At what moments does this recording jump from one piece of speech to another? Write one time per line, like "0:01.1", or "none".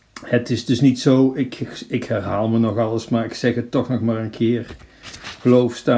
none